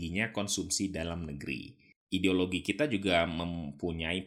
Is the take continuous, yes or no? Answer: yes